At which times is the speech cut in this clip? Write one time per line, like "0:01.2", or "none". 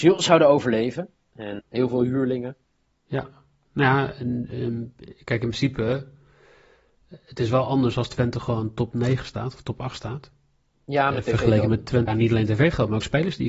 0:01.6
0:12.1